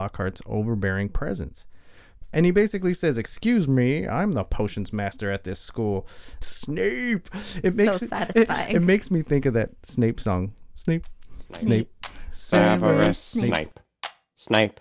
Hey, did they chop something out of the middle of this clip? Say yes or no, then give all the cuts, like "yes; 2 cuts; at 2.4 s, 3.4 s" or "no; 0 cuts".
no; 0 cuts